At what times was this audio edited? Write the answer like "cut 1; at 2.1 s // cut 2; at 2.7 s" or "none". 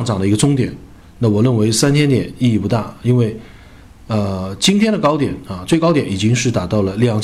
cut 1; at 1.0 s